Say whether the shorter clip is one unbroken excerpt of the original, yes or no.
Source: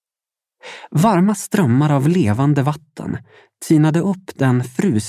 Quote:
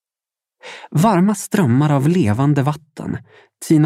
yes